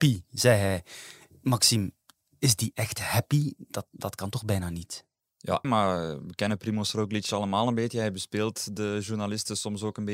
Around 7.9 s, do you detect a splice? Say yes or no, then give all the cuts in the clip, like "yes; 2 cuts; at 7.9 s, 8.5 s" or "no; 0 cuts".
no; 1 cut; at 5.6 s